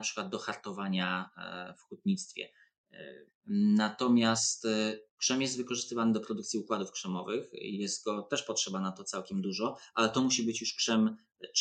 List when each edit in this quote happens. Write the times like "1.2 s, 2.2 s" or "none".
3.3 s

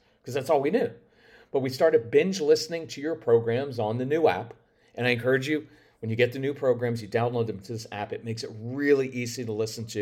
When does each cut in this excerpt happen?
none

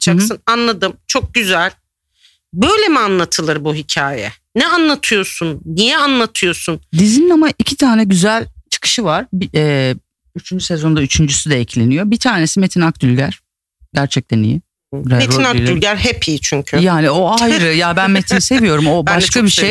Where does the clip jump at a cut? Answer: none

